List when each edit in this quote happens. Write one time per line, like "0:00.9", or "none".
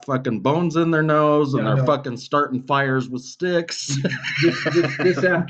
none